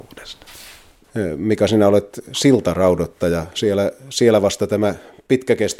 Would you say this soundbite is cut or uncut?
uncut